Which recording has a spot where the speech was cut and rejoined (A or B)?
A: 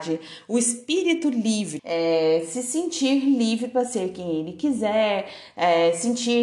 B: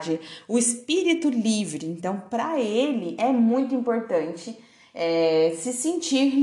A